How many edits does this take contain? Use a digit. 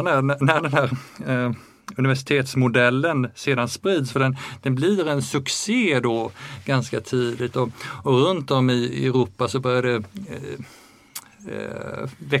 0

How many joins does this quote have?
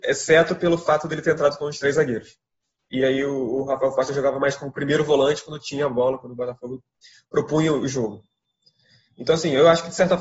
1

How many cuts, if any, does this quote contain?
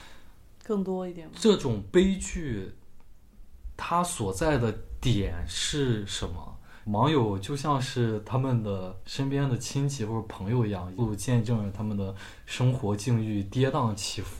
2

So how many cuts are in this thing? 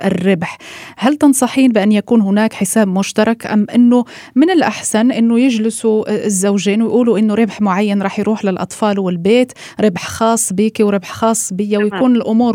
0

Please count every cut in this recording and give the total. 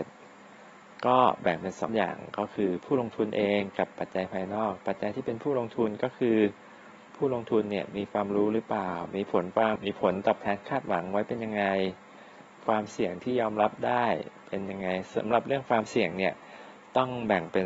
2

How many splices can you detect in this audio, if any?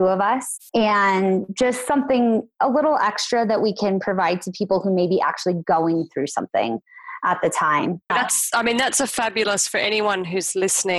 1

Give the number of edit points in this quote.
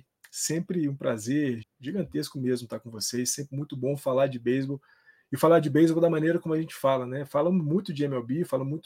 1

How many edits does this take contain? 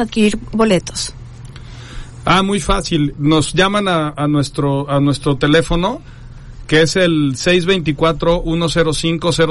1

